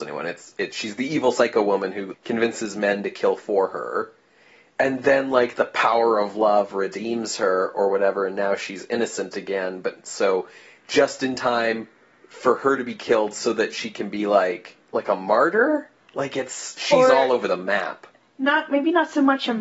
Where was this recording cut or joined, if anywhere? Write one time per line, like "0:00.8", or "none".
0:02.1